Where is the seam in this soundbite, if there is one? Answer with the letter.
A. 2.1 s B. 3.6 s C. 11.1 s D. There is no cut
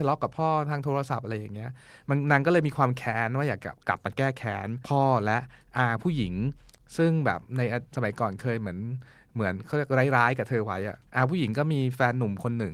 C